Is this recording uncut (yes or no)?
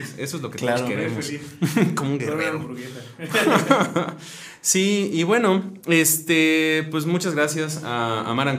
yes